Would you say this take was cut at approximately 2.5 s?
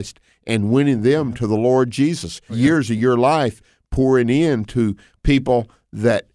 yes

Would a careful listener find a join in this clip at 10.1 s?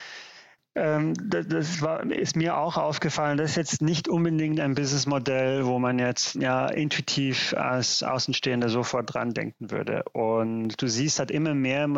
no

